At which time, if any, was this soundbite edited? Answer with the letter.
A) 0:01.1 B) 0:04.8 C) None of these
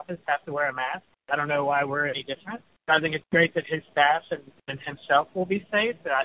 C